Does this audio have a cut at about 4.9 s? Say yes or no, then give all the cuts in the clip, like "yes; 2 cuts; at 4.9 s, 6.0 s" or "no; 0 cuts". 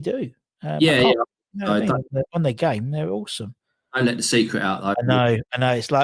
yes; 1 cut; at 4.9 s